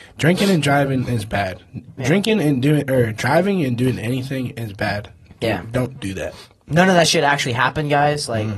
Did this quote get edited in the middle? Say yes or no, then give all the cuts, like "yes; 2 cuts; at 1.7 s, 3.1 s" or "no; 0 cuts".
no; 0 cuts